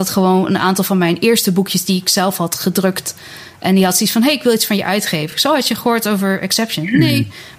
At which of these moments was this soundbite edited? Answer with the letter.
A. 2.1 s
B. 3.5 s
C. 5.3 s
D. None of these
D